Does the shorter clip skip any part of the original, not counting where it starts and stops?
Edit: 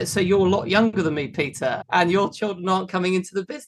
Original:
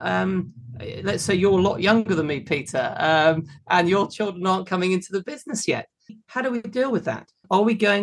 yes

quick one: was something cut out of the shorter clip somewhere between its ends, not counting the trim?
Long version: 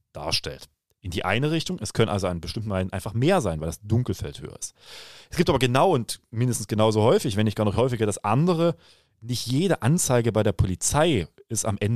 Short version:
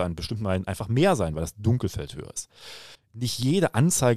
yes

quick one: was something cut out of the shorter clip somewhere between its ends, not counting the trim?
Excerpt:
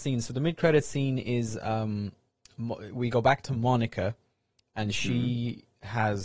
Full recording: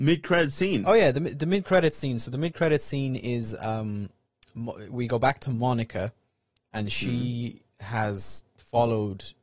no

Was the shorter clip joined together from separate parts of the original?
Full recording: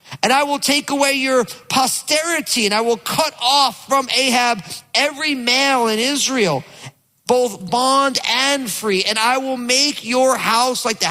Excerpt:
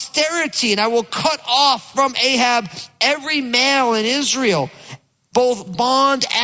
no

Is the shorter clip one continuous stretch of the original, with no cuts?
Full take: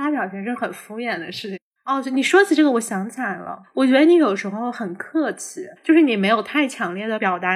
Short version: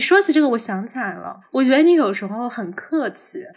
yes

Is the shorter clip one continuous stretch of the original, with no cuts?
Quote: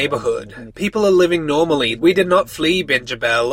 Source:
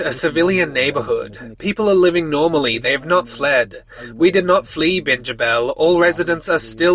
no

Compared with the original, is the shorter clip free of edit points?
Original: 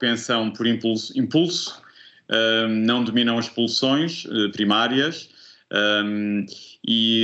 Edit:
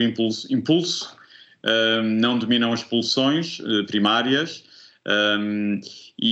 yes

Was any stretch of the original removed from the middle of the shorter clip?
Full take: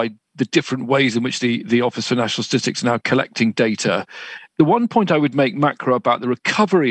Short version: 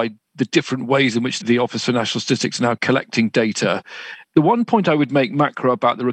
yes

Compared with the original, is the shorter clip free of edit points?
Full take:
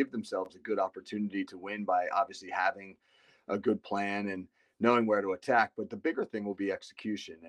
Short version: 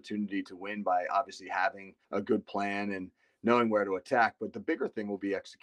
no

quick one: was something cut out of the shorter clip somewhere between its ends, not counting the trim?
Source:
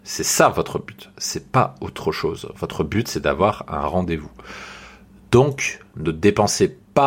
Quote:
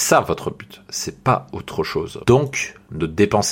yes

